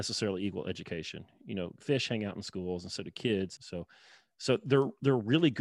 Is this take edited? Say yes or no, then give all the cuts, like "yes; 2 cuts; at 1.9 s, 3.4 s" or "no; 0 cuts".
yes; 1 cut; at 3.6 s